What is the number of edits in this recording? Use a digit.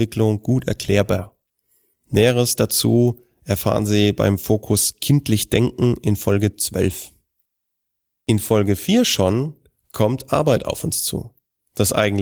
0